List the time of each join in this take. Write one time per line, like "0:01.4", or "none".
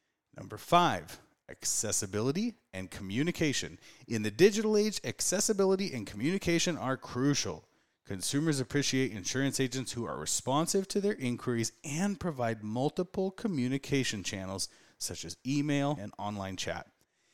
0:16.0